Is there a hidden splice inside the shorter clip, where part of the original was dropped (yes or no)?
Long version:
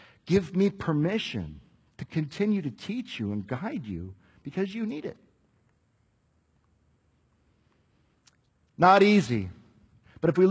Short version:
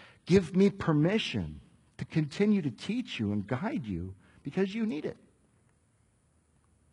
no